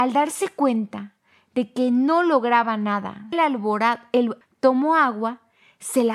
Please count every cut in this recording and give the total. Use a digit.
2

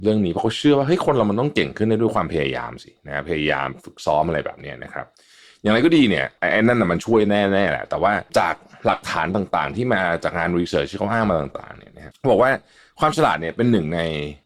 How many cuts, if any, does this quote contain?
1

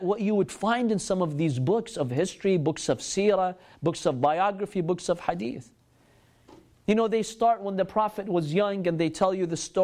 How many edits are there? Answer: 0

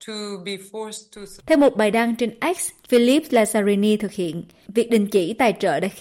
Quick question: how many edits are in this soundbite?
2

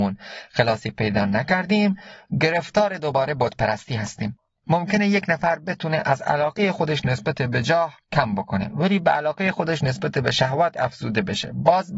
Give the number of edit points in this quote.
1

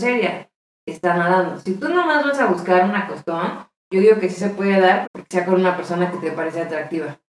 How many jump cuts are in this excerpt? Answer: 1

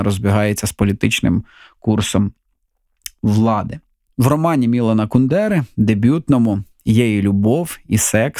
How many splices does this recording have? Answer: 0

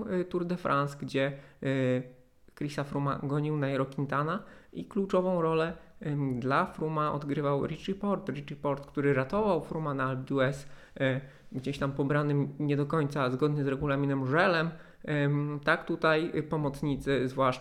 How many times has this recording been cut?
0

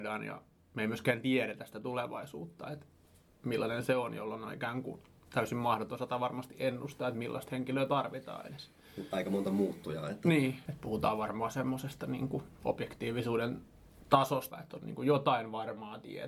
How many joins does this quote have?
2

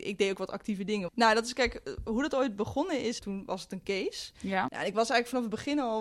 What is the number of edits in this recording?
3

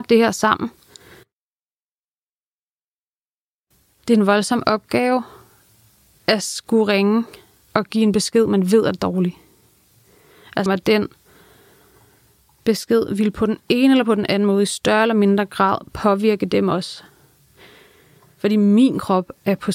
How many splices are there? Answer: 1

